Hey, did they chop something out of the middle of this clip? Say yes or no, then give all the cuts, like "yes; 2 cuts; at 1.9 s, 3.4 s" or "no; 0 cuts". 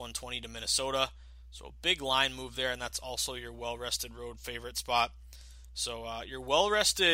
no; 0 cuts